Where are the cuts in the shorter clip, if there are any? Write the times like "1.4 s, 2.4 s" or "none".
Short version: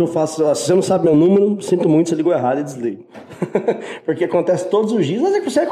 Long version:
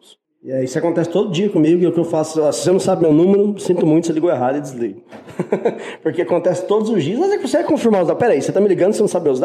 none